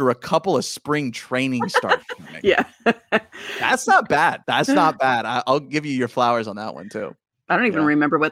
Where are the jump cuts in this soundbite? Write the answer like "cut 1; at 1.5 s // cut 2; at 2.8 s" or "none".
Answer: cut 1; at 4.4 s // cut 2; at 7.3 s